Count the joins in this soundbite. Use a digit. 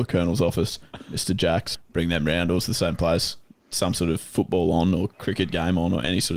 1